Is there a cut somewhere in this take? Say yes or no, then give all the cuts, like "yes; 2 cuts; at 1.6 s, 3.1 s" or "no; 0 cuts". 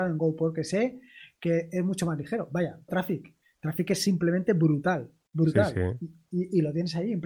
yes; 1 cut; at 2.9 s